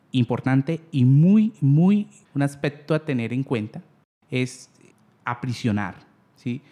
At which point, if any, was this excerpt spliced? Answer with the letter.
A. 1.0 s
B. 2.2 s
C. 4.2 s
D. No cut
B